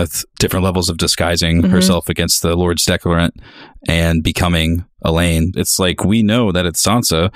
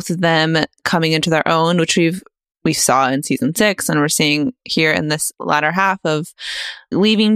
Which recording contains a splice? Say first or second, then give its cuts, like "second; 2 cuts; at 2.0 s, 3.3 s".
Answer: first; 1 cut; at 5.5 s